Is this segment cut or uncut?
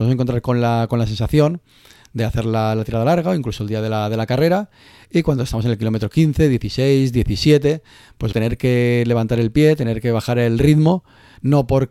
cut